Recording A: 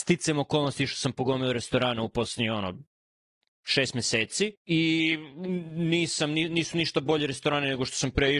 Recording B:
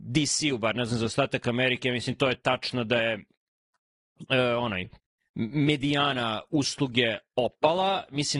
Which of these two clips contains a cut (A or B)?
A